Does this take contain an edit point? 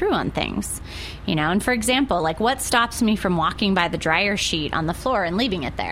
no; 0 cuts

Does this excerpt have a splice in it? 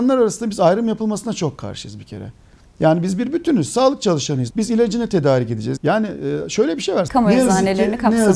yes; 3 cuts; at 4.5 s, 5.8 s, 7.1 s

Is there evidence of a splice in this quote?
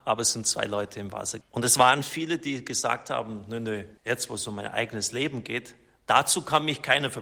yes; 2 cuts; at 1.4 s, 4.0 s

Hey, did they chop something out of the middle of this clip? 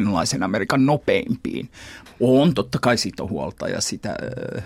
yes; 1 cut; at 2.1 s

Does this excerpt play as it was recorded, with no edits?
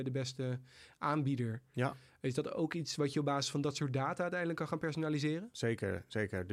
yes; 0 cuts

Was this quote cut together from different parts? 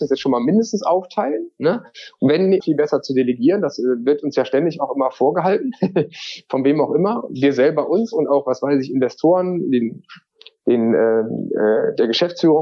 yes; 1 cut; at 2.6 s

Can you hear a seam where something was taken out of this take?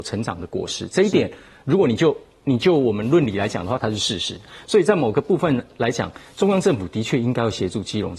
yes; 1 cut; at 3.8 s

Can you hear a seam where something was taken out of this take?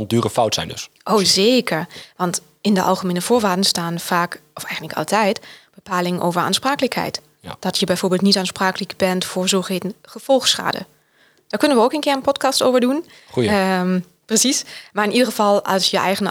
no; 0 cuts

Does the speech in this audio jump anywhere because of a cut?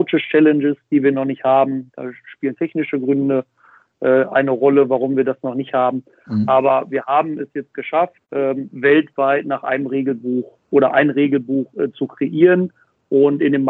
yes; 1 cut; at 8.2 s

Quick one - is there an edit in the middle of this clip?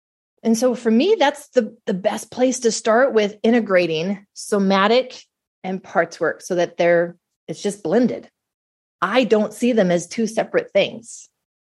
no; 0 cuts

